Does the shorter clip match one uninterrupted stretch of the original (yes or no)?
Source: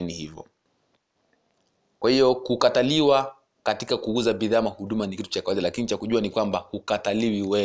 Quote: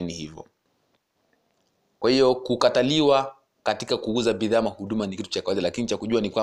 yes